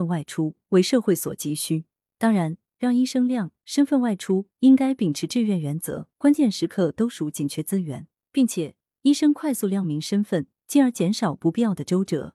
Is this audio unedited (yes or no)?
no